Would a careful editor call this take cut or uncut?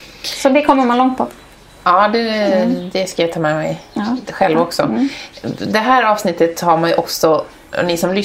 uncut